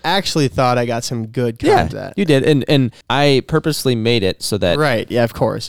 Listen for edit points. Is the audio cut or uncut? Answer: cut